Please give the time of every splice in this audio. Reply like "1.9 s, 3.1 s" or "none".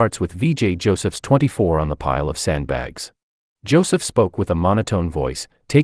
3.5 s